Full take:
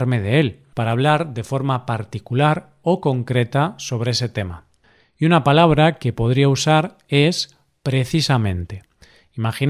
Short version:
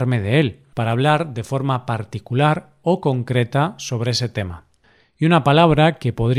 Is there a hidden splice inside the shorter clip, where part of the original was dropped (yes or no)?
no